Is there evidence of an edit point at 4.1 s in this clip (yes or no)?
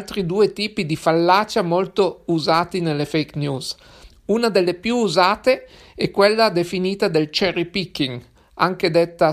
yes